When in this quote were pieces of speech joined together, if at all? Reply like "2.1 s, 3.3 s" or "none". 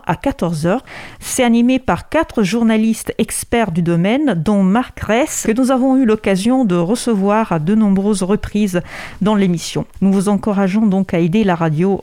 5.4 s, 9.9 s